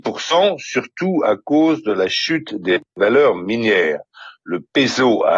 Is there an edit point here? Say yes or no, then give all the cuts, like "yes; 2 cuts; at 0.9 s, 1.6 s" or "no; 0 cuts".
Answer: no; 0 cuts